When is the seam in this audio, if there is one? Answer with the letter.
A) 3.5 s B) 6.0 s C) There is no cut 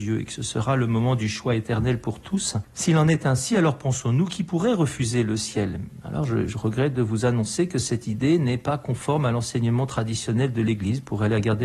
C